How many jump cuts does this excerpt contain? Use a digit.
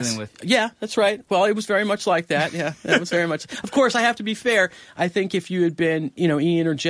0